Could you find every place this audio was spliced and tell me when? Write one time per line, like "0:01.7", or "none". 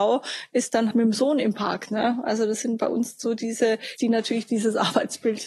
0:00.9
0:04.0